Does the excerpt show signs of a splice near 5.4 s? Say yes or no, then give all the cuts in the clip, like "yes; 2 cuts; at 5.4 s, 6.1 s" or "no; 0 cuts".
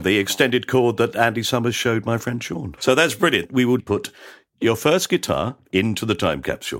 no; 2 cuts; at 2.8 s, 3.8 s